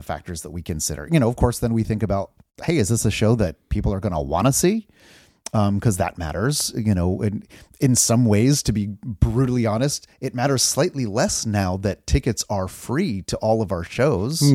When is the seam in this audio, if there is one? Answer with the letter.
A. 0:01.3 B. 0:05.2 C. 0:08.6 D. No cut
D